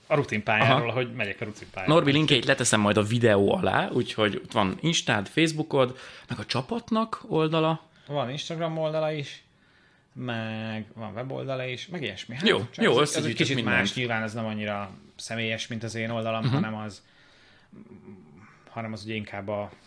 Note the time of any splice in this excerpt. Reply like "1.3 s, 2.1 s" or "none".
8.1 s